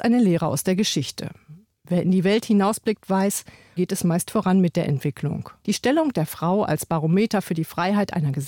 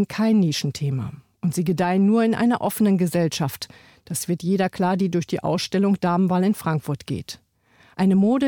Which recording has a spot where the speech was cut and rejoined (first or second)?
first